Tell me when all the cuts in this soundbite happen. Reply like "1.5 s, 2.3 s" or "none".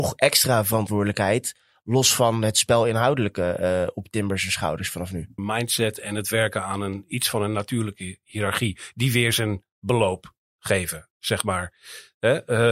5.4 s